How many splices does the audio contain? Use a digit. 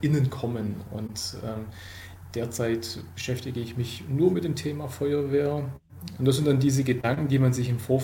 1